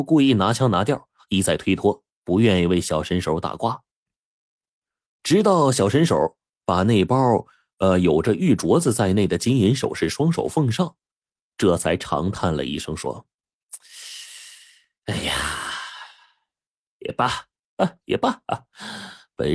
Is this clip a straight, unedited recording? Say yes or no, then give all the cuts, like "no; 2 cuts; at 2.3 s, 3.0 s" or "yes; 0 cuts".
yes; 0 cuts